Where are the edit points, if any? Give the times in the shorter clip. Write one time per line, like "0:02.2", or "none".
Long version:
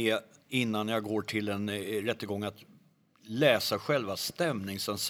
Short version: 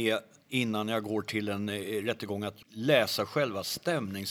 0:02.6